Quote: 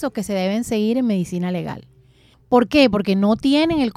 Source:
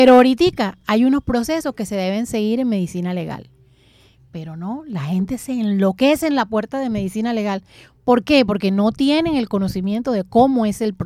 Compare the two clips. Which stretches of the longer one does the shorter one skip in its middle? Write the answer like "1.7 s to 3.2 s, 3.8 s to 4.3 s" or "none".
4.0 s to 7.9 s